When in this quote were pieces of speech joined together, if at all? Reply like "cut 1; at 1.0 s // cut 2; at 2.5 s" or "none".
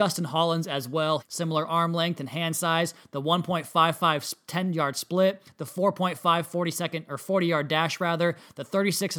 cut 1; at 1.2 s